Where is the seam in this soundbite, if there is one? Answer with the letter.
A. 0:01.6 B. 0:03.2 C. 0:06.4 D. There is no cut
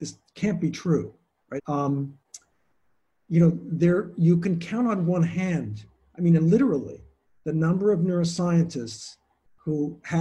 A